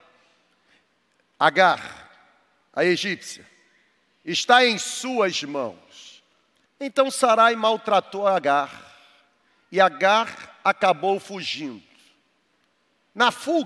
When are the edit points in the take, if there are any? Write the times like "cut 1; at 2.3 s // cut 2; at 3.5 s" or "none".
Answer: cut 1; at 6.7 s